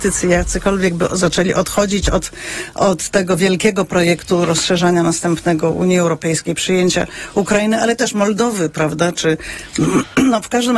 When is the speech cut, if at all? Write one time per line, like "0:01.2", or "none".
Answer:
none